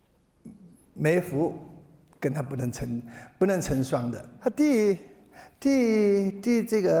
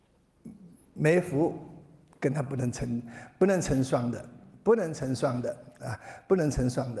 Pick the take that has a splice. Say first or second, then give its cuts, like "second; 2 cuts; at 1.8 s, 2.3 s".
first; 1 cut; at 4.4 s